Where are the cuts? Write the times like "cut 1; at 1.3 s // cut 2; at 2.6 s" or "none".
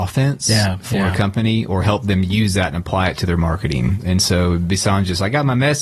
none